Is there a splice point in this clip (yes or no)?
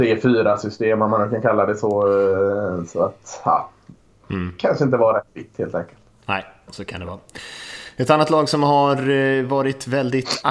no